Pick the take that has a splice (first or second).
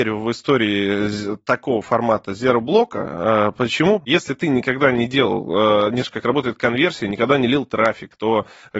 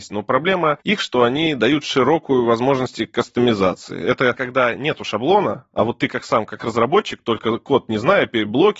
first